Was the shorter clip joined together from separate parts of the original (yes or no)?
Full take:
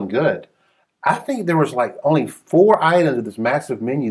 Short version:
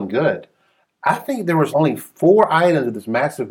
yes